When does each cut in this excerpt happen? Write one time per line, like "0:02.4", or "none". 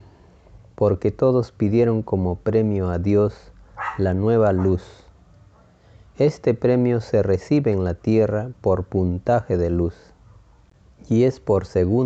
none